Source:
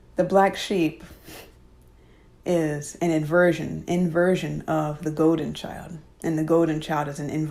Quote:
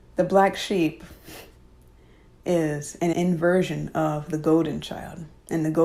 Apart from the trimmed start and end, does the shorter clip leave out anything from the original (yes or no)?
yes